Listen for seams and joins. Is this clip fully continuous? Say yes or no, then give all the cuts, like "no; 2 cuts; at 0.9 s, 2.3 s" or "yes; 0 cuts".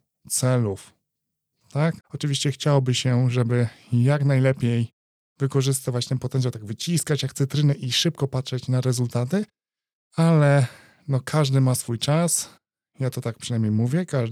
no; 1 cut; at 2.0 s